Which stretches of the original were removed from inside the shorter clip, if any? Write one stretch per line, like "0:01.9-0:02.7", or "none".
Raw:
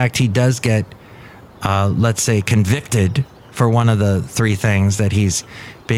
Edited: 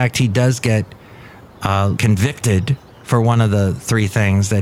0:02.0-0:02.4